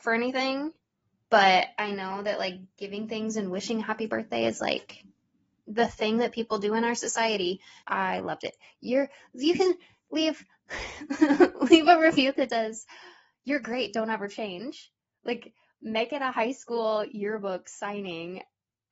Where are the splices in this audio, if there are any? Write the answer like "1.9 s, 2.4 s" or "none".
7.8 s, 12.5 s